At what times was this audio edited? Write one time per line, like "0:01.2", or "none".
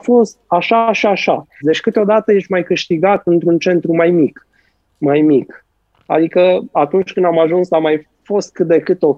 0:01.6
0:05.9